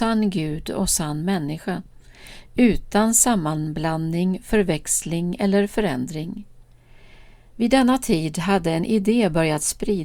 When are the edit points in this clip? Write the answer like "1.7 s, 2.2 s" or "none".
none